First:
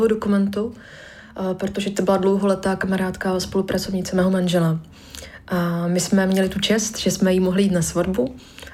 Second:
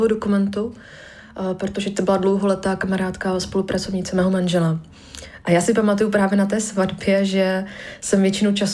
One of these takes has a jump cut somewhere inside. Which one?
second; 1 cut; at 5.4 s

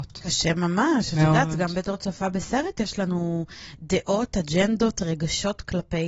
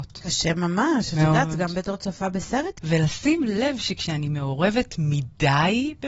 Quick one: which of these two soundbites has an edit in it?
second; 1 cut; at 2.8 s

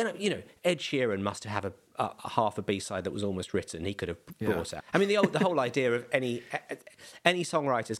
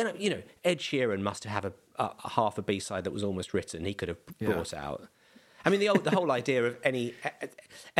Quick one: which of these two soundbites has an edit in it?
first; 1 cut; at 4.8 s

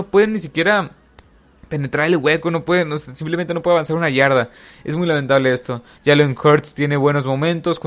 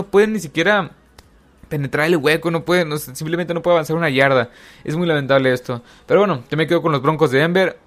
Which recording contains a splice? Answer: first; 1 cut; at 6.0 s

